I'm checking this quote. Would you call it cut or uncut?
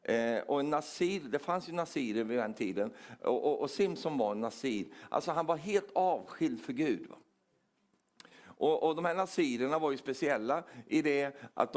uncut